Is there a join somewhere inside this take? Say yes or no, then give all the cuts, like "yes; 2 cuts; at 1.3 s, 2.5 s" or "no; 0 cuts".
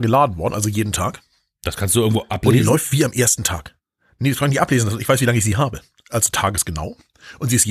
no; 0 cuts